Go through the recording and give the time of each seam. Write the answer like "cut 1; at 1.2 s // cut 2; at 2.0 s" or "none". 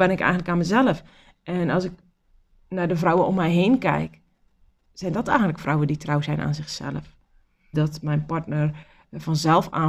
cut 1; at 7.7 s